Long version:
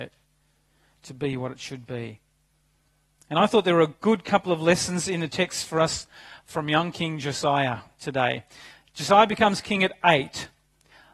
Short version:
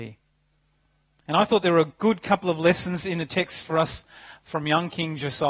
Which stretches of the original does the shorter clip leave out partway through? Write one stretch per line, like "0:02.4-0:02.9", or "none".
none